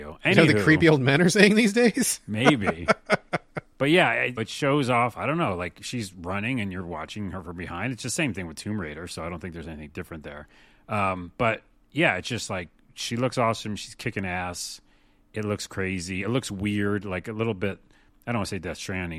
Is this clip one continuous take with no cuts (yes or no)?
no